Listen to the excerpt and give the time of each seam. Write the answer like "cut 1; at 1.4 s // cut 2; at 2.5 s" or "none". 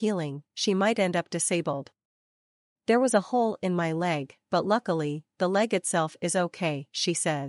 none